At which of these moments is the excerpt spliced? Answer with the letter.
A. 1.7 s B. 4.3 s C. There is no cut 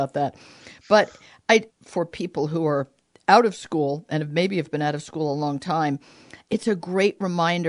A